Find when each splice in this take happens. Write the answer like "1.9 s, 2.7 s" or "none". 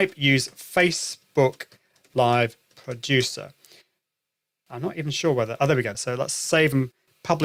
5.9 s